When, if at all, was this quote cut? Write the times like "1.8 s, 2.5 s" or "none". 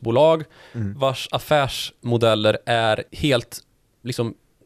3.1 s